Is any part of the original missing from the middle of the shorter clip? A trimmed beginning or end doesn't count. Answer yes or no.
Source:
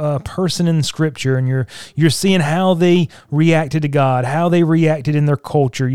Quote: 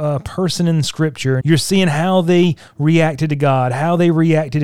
yes